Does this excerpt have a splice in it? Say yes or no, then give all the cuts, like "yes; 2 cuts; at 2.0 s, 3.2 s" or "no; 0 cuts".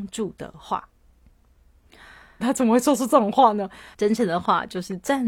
yes; 2 cuts; at 2.4 s, 3.9 s